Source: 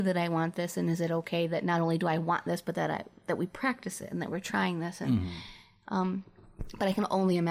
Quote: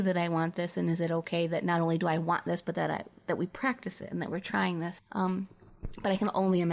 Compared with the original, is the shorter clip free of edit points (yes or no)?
no